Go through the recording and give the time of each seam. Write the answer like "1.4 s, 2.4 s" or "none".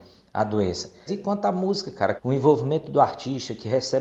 1.1 s, 2.2 s